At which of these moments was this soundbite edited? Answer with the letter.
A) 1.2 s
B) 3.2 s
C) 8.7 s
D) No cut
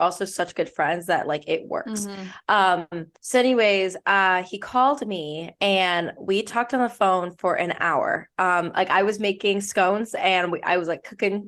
B